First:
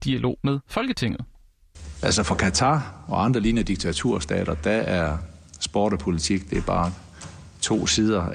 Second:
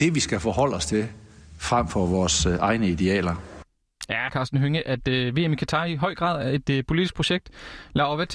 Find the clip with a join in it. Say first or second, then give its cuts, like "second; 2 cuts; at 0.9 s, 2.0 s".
second; 1 cut; at 4.3 s